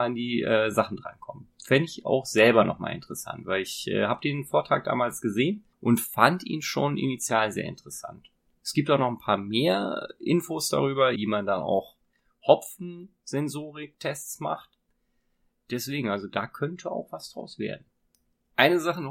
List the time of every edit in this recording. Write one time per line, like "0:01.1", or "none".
0:05.7
0:11.2